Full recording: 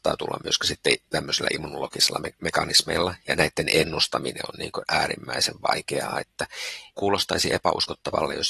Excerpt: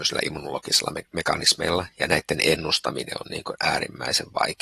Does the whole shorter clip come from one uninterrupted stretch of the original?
yes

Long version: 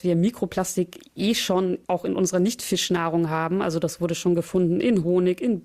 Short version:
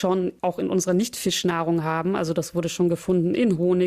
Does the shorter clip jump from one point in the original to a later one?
no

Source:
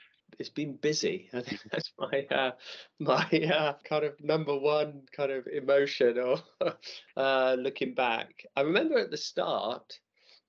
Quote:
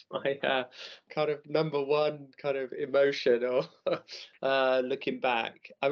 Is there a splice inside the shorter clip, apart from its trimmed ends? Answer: yes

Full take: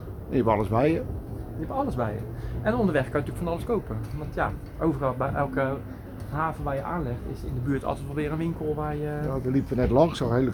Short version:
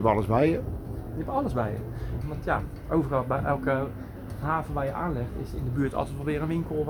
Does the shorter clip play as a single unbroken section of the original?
no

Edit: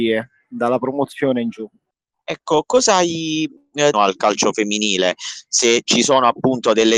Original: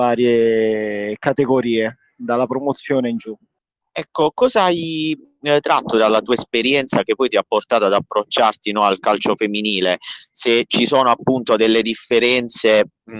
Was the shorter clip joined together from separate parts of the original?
yes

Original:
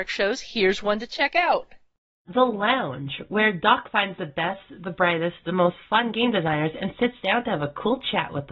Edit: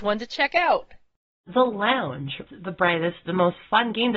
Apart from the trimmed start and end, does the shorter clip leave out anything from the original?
yes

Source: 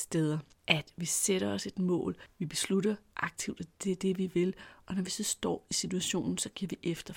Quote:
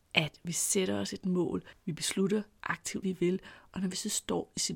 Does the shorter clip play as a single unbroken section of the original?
no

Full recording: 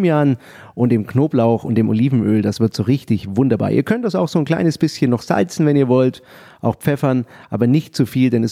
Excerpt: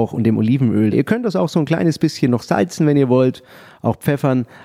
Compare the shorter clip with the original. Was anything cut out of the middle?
yes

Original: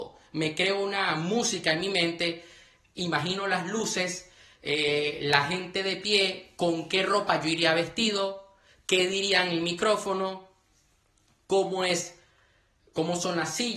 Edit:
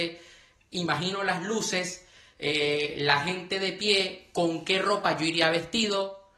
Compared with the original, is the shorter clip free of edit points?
yes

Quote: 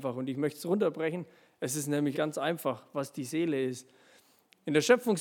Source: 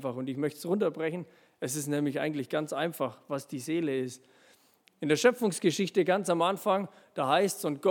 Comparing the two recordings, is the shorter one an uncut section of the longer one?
no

